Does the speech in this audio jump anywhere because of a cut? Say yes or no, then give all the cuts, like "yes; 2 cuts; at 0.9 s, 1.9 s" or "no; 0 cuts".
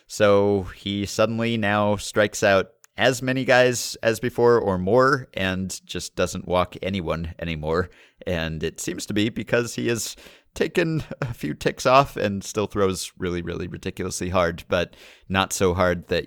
no; 0 cuts